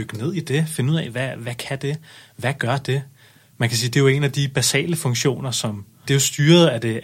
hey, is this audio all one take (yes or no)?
no